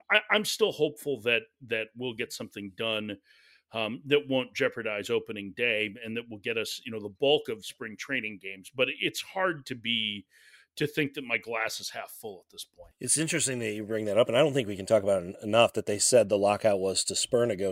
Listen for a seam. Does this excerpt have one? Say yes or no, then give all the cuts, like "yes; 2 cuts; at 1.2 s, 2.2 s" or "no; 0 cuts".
no; 0 cuts